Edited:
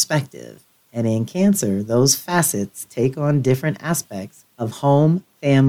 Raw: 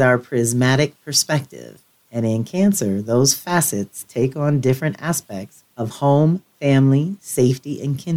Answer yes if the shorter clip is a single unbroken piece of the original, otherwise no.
yes